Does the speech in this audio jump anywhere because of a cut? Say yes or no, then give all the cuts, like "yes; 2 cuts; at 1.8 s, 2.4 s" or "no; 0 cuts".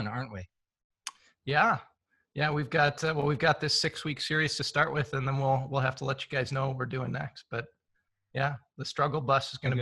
no; 0 cuts